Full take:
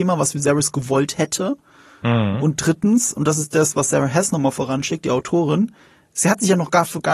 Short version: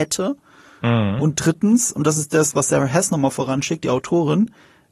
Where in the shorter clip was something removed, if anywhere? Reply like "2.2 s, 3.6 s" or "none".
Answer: none